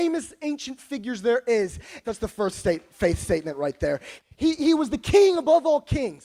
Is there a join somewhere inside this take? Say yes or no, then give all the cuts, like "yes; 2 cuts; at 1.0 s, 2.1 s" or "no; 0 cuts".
yes; 2 cuts; at 2.0 s, 4.2 s